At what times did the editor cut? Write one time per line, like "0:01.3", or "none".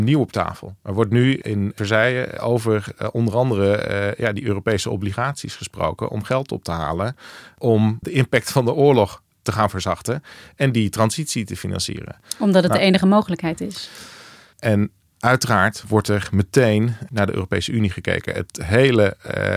0:08.0
0:14.5
0:17.1